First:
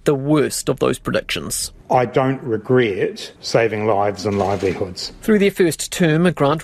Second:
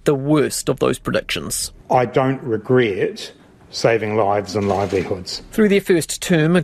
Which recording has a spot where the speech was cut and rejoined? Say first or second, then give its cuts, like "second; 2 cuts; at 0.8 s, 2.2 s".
first; 1 cut; at 3.4 s